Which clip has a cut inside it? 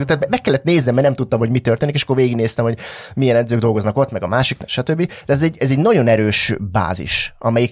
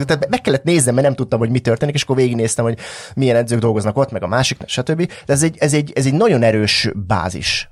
first; 1 cut; at 5.6 s

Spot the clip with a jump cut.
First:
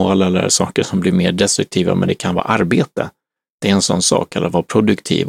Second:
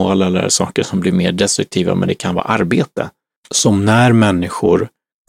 second; 1 cut; at 3.4 s

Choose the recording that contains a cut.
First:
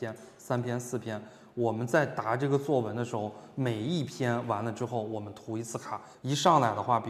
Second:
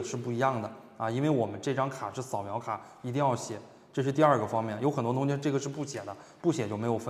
first; 1 cut; at 6.1 s

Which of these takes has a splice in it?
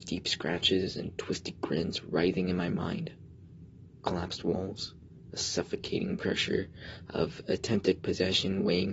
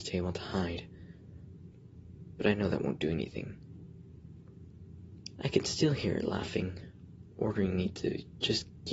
second; 1 cut; at 5.4 s

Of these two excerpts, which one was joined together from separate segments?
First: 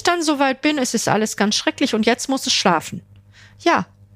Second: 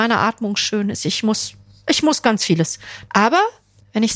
second; 1 cut; at 3.1 s

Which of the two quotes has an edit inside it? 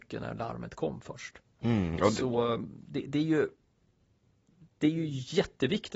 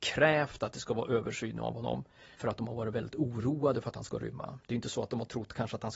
second; 1 cut; at 2.3 s

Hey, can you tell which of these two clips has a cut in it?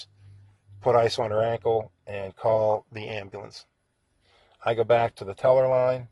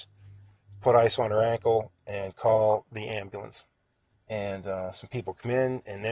second; 1 cut; at 4.1 s

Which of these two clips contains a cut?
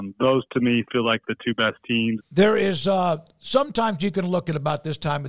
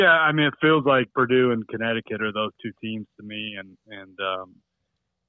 first; 1 cut; at 2.2 s

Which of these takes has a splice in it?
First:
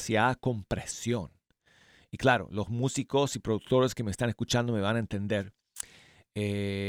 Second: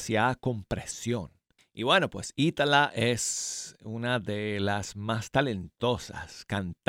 second; 1 cut; at 1.6 s

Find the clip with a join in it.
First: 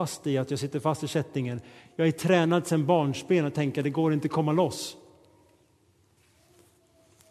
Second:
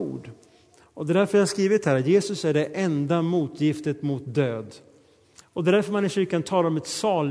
second; 1 cut; at 5.4 s

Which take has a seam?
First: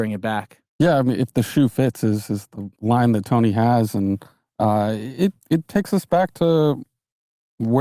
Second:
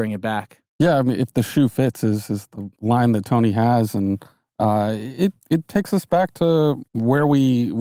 second; 1 cut; at 6.9 s

